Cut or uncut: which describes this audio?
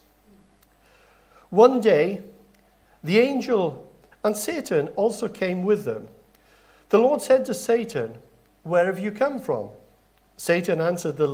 cut